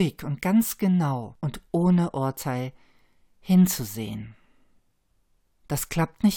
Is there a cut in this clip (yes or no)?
no